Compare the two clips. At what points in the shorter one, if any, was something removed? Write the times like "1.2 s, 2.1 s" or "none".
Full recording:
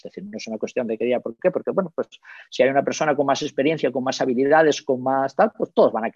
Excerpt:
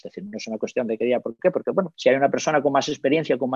1.9 s